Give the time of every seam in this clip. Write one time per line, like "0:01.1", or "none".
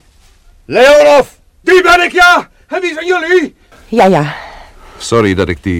0:03.7